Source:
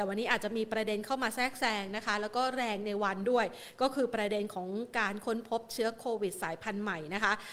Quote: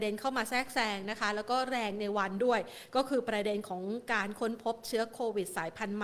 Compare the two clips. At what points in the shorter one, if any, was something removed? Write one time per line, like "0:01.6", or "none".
none